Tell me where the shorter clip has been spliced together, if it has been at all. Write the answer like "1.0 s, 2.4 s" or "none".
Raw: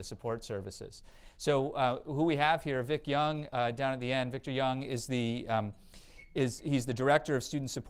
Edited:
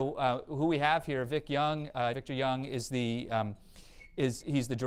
2.1 s